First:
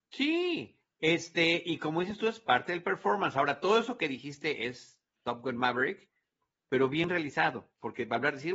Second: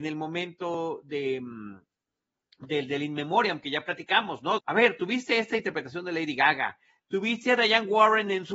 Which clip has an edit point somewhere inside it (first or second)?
second